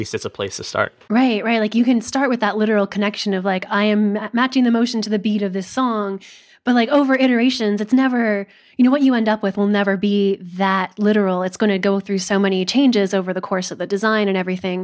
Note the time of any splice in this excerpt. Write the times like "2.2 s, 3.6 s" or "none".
none